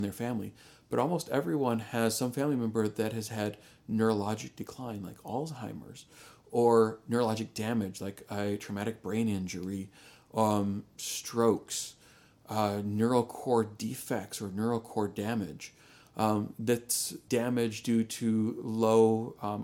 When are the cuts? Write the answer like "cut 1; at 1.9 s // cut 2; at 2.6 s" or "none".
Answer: cut 1; at 16.0 s // cut 2; at 17.3 s